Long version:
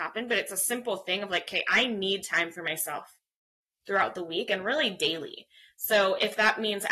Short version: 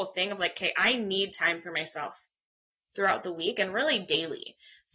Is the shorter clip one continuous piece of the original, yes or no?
yes